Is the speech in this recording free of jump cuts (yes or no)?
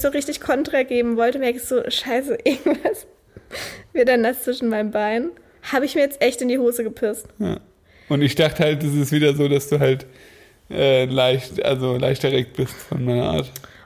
yes